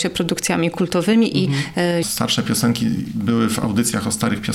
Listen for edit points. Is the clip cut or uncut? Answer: cut